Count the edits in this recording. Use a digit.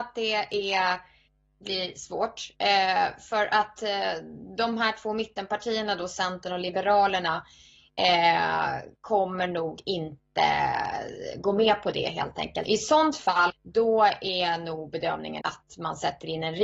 2